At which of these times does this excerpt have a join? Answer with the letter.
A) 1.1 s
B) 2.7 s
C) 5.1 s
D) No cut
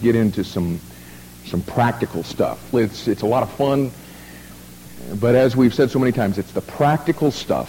B